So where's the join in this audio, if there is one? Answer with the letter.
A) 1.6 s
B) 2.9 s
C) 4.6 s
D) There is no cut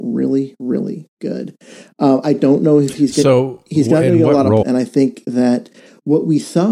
C